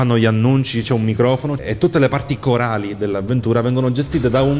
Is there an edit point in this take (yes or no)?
yes